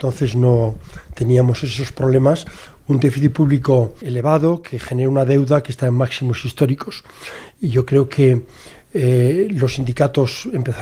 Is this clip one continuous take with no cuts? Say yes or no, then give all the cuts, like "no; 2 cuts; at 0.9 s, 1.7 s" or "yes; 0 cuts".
no; 1 cut; at 4.0 s